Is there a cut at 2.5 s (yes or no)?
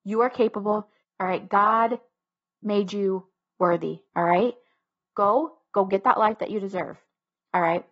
no